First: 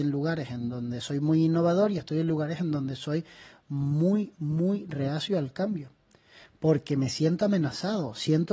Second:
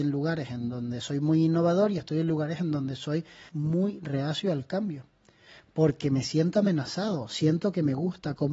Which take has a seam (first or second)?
second